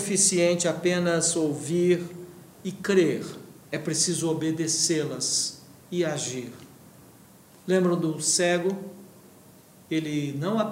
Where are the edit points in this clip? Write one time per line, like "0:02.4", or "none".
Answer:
0:03.6